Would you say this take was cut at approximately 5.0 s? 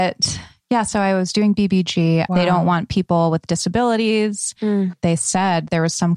no; 1 cut; at 2.3 s

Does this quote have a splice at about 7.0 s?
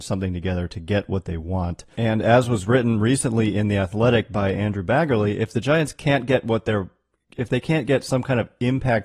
no; 1 cut; at 1.9 s

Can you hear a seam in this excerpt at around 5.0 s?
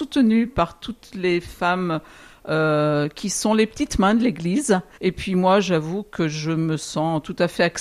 yes; 1 cut; at 5.0 s

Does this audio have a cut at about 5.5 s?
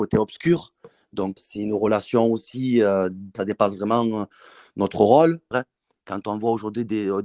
yes; 3 cuts; at 1.4 s, 3.3 s, 5.5 s

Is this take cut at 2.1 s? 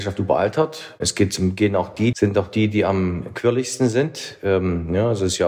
yes; 1 cut; at 2.1 s

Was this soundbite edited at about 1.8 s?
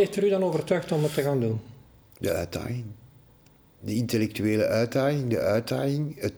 no; 0 cuts

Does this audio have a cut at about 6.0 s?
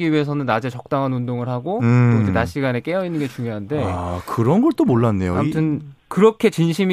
yes; 1 cut; at 6.0 s

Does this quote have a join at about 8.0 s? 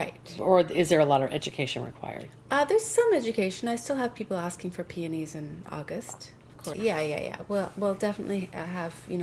no; 1 cut; at 6.7 s

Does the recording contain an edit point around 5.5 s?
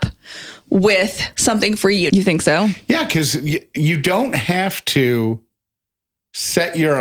no; 1 cut; at 2.1 s

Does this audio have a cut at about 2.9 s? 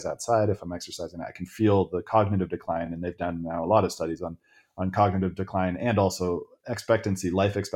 no; 0 cuts

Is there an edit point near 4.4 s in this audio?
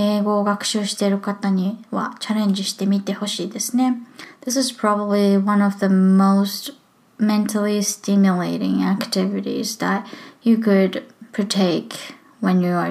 no; 0 cuts

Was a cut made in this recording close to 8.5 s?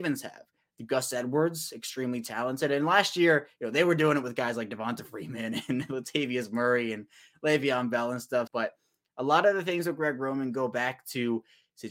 yes; 1 cut; at 8.5 s

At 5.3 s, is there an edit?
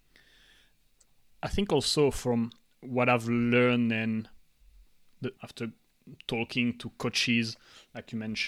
yes; 1 cut; at 5.3 s

